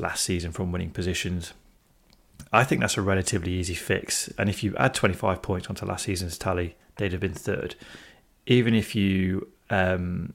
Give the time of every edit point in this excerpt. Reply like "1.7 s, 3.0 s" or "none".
none